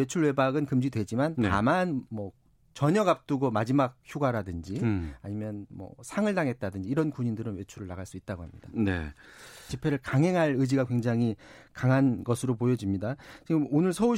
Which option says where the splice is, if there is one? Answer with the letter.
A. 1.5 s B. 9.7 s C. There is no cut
B